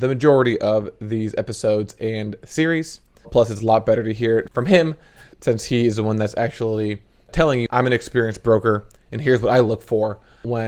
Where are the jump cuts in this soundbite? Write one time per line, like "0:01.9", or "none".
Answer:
0:03.2